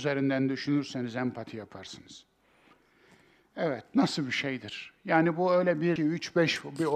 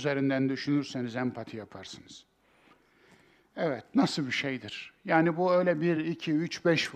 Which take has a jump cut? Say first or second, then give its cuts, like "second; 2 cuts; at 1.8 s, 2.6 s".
first; 1 cut; at 6.0 s